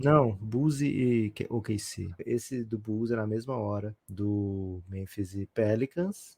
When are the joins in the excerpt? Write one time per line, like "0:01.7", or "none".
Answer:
0:02.2
0:04.0